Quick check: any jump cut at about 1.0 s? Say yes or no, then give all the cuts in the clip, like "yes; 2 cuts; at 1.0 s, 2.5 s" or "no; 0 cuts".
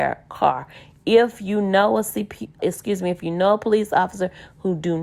no; 1 cut; at 2.6 s